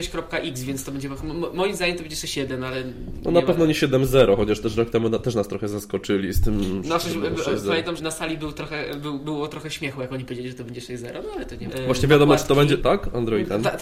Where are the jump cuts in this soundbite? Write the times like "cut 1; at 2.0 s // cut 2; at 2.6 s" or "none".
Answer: cut 1; at 8.0 s // cut 2; at 11.7 s // cut 3; at 12.8 s

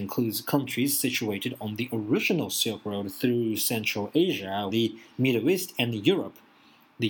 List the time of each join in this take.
cut 1; at 4.7 s

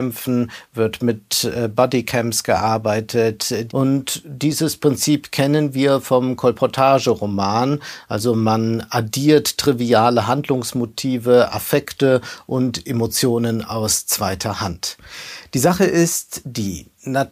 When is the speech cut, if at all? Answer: cut 1; at 3.7 s

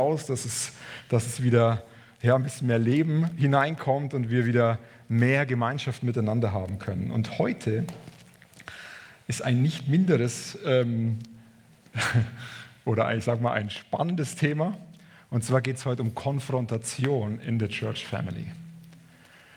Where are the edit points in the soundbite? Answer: none

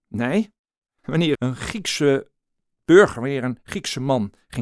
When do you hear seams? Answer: cut 1; at 1.3 s

